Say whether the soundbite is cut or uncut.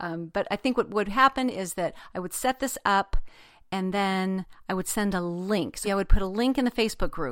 cut